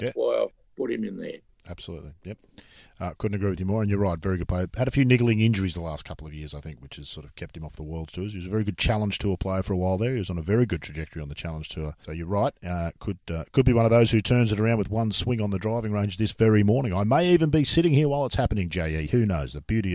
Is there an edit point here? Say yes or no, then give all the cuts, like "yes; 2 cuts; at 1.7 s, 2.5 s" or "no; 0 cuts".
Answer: yes; 1 cut; at 12.0 s